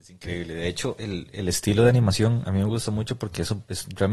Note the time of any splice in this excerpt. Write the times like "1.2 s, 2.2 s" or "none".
none